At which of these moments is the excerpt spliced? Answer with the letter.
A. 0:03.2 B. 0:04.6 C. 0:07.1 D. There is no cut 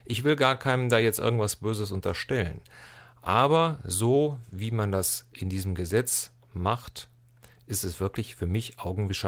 D